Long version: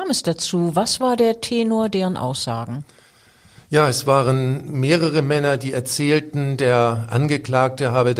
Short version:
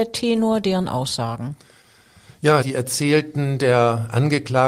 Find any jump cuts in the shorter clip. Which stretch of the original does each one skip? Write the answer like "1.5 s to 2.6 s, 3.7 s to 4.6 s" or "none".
3.9 s to 5.6 s